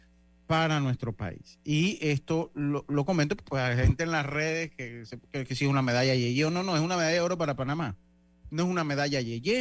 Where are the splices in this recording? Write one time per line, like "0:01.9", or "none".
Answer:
0:03.5